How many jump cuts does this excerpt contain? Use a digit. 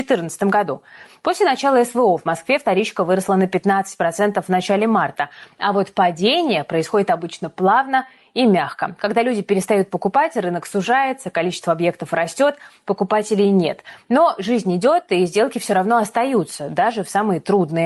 0